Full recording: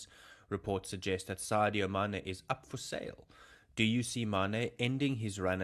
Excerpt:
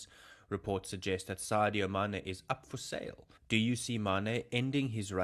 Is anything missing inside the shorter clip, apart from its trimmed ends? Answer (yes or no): yes